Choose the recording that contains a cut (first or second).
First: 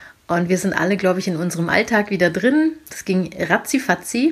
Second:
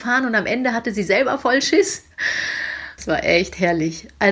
second